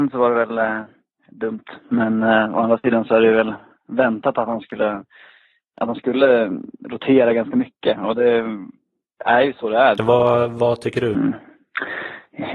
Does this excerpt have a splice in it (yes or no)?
yes